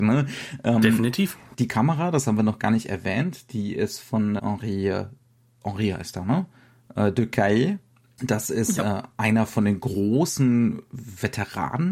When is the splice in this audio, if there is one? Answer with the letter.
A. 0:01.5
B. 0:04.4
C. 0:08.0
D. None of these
B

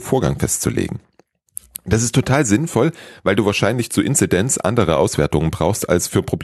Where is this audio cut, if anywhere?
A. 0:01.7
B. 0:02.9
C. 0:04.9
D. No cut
D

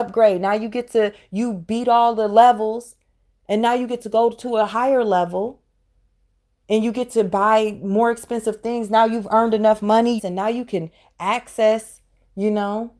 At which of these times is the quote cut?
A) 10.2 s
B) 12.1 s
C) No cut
A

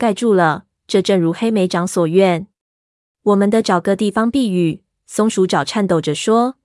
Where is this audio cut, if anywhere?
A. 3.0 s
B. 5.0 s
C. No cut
A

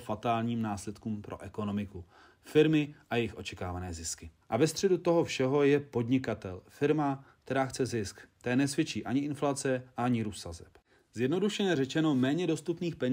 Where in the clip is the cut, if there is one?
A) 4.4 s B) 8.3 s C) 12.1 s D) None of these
A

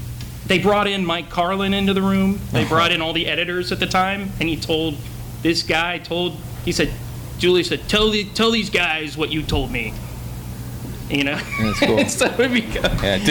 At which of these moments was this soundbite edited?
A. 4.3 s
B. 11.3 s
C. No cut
C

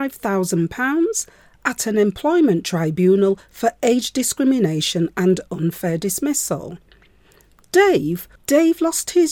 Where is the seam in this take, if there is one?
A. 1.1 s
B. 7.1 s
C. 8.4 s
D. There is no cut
C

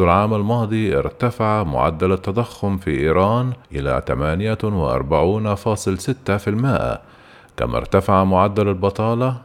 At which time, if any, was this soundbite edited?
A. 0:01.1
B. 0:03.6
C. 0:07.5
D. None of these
B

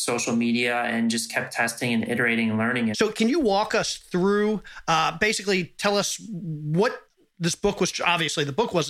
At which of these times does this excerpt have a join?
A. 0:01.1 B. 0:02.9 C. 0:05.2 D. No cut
B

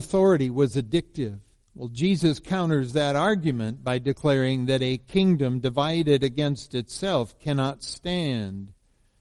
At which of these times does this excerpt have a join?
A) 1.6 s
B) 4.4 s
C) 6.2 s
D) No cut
A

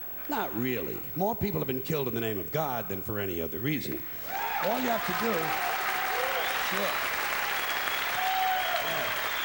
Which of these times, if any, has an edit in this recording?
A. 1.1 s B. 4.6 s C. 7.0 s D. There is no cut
D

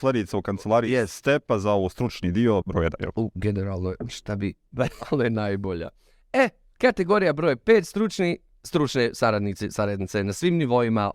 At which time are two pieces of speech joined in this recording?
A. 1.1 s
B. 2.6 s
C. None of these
B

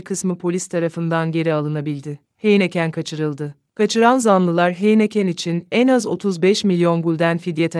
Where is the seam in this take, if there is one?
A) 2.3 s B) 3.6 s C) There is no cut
A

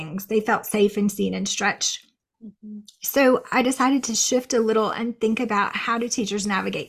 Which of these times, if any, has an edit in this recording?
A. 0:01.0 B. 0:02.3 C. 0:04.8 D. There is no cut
B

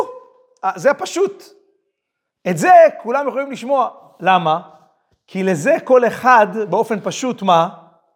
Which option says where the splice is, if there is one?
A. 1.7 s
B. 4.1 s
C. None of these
C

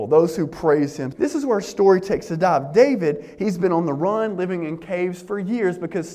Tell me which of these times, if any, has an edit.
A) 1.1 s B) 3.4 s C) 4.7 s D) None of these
A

